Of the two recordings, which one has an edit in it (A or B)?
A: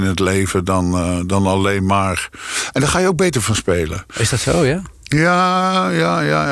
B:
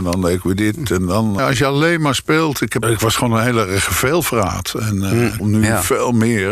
B